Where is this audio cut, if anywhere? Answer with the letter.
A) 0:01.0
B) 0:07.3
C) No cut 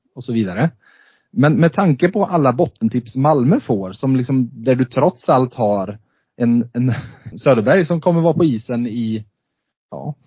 B